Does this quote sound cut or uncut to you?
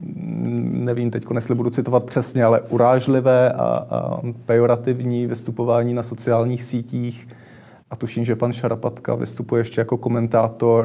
uncut